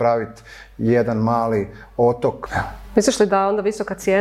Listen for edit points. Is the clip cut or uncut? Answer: cut